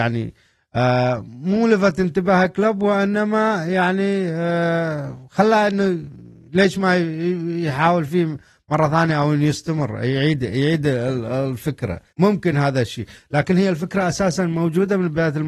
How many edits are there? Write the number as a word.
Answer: one